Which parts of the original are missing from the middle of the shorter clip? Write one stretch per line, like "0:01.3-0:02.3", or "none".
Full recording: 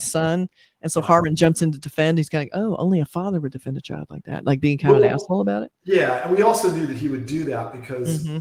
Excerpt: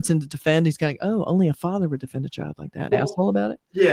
0:04.4-0:05.0